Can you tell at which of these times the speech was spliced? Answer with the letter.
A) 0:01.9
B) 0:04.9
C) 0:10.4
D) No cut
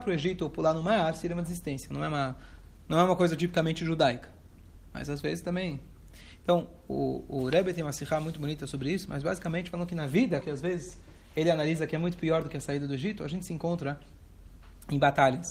C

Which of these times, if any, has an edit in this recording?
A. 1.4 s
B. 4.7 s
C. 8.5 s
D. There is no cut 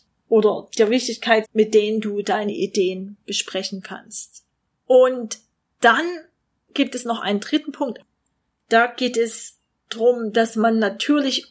A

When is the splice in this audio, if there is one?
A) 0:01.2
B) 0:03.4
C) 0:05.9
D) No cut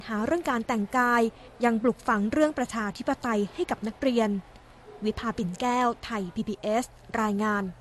D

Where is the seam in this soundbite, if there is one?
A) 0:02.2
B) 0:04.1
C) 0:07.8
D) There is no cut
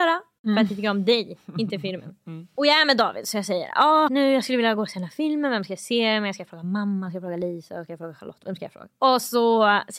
B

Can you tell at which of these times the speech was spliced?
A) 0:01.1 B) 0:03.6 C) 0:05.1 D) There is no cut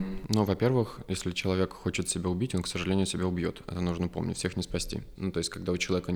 C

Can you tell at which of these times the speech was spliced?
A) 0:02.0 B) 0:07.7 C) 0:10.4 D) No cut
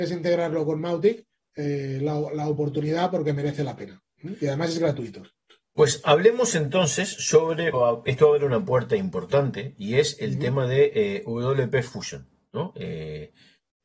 B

